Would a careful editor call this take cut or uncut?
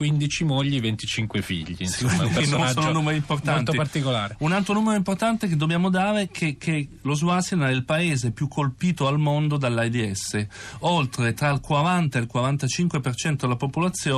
uncut